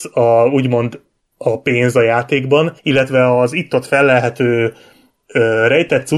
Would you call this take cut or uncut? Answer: cut